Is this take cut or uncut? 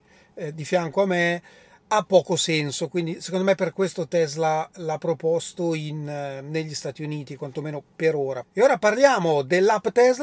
cut